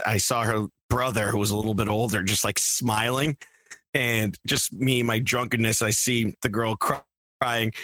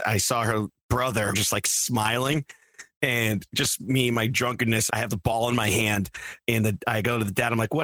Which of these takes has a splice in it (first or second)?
second